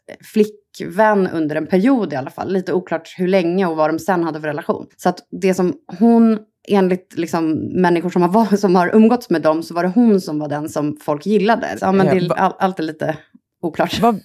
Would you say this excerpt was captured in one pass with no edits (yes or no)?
no